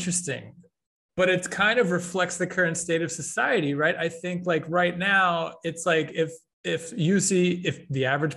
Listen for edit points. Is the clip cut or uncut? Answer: cut